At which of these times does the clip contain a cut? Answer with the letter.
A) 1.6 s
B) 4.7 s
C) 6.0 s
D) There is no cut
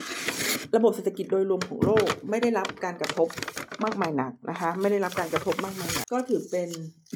C